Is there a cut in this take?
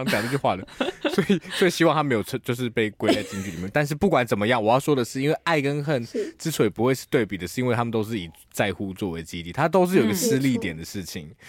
no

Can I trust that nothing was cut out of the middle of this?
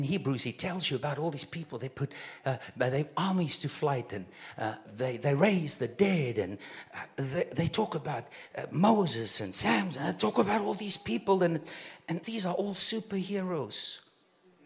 no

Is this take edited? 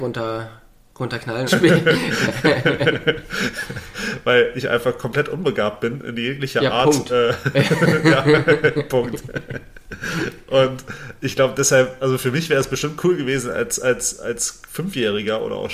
yes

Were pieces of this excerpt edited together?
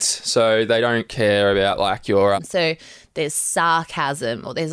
yes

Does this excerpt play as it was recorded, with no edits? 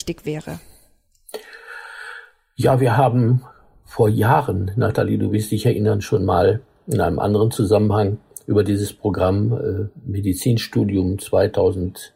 yes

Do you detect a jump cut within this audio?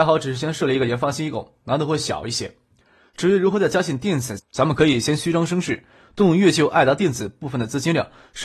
yes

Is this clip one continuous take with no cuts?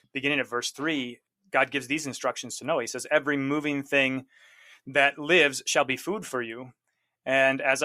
yes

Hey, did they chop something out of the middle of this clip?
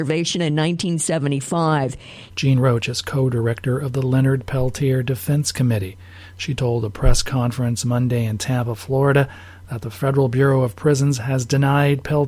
yes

